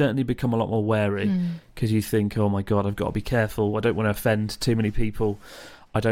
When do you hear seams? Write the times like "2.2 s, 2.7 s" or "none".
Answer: none